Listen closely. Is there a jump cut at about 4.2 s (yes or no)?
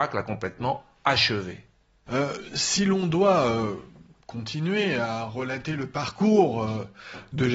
no